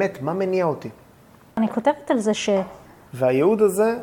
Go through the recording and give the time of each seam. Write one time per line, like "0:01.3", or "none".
0:01.5
0:03.1